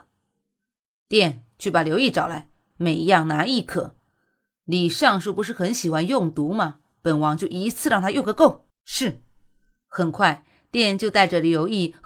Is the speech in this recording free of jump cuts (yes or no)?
no